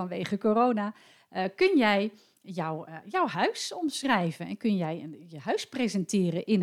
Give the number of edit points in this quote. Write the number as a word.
zero